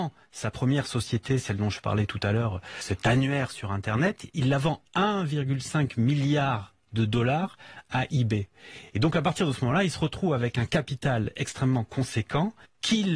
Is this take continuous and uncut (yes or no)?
yes